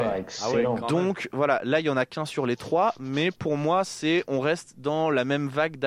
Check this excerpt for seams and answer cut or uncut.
uncut